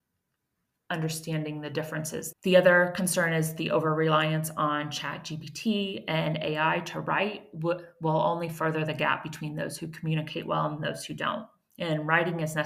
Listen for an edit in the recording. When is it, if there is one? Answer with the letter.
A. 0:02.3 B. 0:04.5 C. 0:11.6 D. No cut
A